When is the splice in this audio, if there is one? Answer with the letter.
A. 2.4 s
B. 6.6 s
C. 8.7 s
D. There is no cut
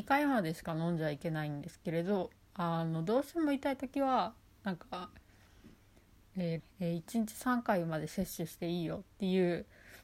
B